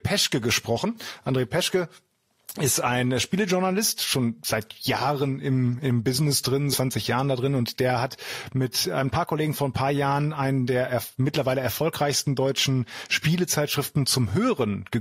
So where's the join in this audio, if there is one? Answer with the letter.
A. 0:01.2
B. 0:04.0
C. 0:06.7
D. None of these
C